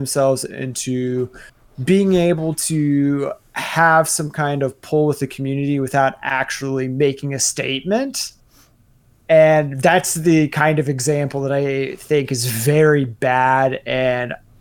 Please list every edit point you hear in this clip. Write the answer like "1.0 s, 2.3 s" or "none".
none

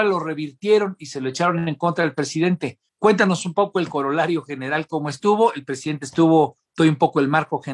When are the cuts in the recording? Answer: 2.9 s

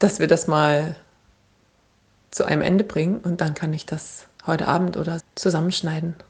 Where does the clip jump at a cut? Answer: 5.2 s

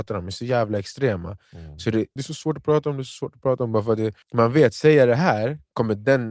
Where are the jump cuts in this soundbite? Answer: 2.2 s, 4.2 s

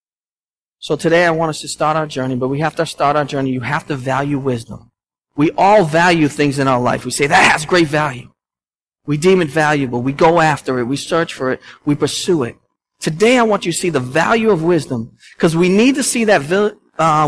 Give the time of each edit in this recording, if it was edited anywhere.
none

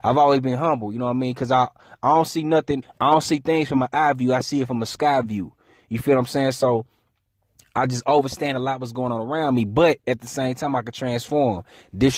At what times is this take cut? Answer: 2.8 s

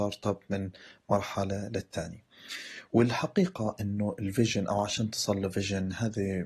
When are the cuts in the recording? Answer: none

